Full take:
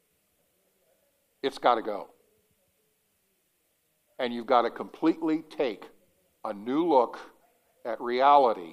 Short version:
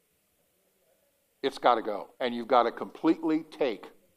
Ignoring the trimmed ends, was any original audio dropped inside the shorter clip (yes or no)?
yes